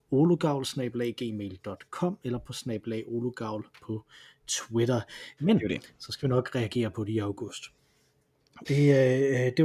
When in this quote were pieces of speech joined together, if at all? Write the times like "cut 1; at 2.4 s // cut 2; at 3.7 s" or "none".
cut 1; at 5.4 s // cut 2; at 8.6 s